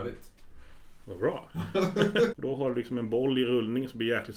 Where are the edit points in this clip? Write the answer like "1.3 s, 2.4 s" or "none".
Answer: 2.3 s